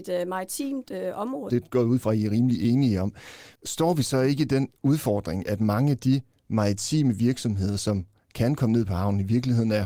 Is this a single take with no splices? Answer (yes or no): no